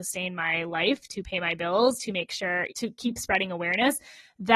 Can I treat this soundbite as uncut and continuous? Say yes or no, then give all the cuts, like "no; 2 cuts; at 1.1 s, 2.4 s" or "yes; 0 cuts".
no; 1 cut; at 2.7 s